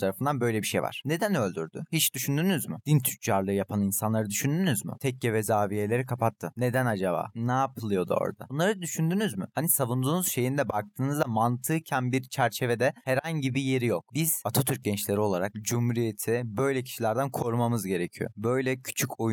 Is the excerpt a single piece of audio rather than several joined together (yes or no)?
yes